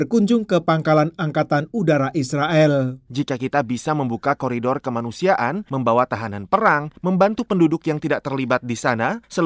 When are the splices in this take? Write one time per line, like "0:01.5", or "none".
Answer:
0:03.1